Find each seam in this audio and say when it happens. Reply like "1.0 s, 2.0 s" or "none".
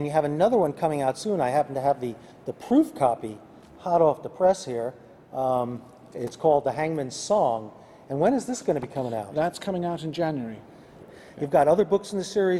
11.0 s